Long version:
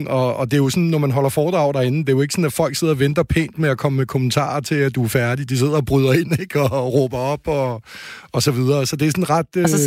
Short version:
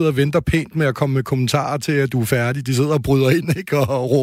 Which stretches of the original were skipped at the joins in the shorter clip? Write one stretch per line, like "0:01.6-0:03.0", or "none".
none

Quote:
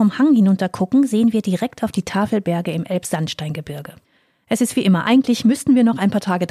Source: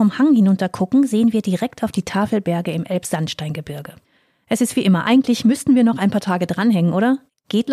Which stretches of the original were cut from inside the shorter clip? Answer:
none

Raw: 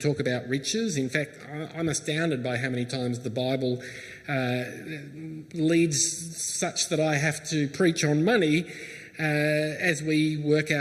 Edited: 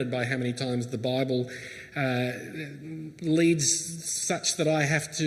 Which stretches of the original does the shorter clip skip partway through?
none

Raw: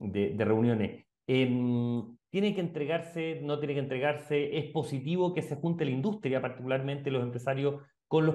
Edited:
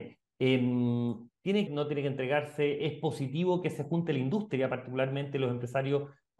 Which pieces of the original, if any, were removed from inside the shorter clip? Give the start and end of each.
0:02.5-0:03.4

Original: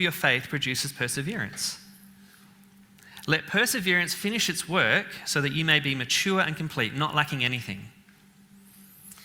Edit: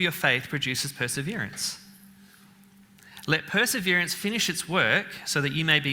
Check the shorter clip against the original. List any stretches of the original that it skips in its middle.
none

